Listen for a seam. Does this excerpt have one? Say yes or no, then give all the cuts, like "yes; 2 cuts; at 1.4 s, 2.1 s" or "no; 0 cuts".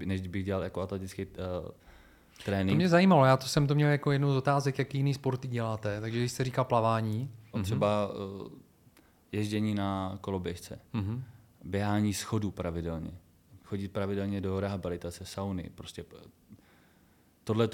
yes; 2 cuts; at 7.5 s, 13.6 s